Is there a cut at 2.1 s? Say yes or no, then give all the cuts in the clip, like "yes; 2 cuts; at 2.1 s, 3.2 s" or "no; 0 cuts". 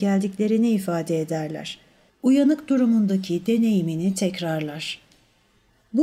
yes; 1 cut; at 2.1 s